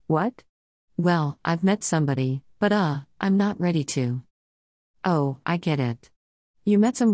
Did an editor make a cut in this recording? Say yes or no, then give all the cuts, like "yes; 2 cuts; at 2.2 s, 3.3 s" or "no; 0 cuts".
no; 0 cuts